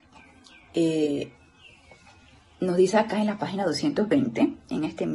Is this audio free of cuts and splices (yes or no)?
yes